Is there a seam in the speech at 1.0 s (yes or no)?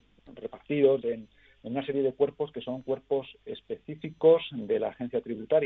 yes